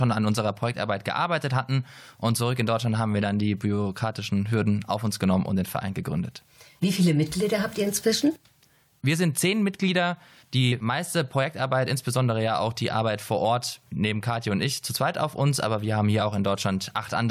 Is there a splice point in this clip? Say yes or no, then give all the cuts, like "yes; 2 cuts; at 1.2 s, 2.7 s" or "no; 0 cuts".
no; 0 cuts